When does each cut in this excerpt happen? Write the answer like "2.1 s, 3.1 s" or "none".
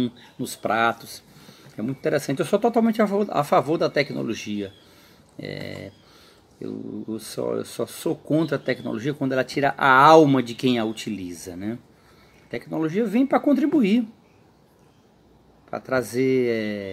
none